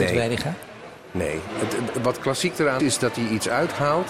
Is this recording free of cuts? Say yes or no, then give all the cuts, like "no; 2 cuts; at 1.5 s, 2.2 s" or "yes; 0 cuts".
no; 1 cut; at 2.8 s